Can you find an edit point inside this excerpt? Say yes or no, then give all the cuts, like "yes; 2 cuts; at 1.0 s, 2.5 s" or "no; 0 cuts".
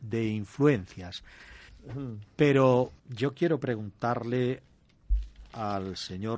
yes; 2 cuts; at 1.7 s, 3.0 s